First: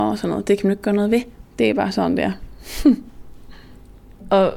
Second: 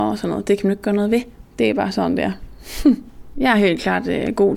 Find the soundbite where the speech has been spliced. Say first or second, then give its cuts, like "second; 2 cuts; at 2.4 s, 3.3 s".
second; 1 cut; at 3.3 s